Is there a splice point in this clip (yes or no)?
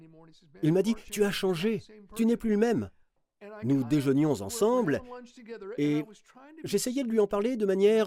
no